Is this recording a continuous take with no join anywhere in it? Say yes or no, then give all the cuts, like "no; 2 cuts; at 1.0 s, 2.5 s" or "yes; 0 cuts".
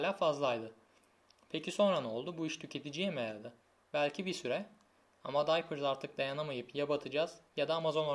yes; 0 cuts